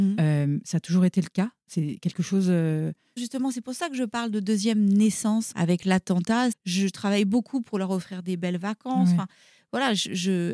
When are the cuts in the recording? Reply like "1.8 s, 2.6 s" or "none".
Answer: 3.2 s, 5.5 s, 6.5 s